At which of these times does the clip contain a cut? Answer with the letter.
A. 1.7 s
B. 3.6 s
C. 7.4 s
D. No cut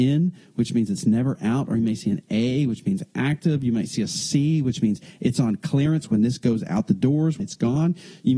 C